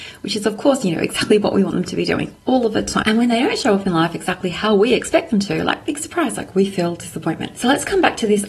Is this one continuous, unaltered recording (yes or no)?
no